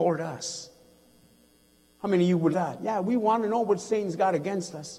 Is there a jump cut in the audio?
yes; 1 cut; at 2.5 s

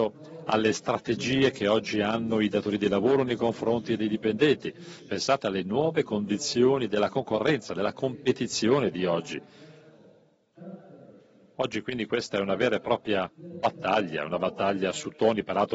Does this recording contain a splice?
no; 0 cuts

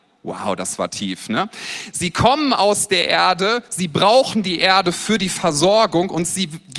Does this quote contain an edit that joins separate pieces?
no; 0 cuts

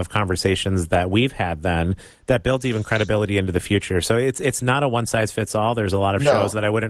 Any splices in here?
no; 0 cuts

